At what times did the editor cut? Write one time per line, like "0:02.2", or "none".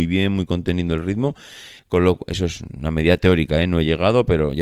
0:01.8